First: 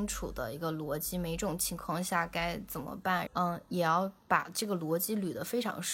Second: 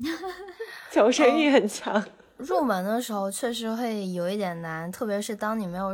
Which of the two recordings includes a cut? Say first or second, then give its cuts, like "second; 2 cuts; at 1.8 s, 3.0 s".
first; 1 cut; at 3.3 s